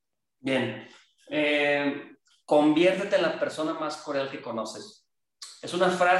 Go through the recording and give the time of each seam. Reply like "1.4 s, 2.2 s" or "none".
none